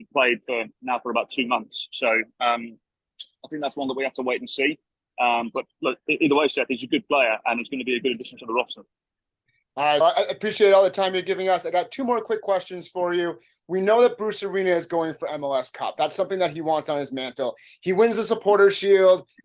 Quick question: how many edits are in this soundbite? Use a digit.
1